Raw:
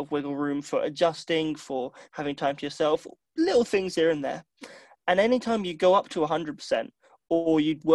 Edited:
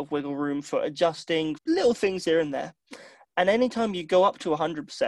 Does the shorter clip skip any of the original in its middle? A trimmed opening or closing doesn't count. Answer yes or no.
yes